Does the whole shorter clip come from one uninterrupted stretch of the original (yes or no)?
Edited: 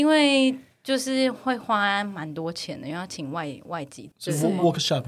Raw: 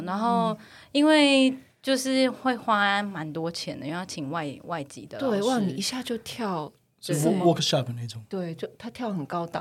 no